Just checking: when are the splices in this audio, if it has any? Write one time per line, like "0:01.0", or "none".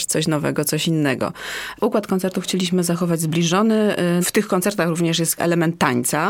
0:01.8
0:04.2